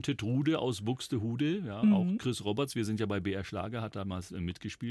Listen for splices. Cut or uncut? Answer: uncut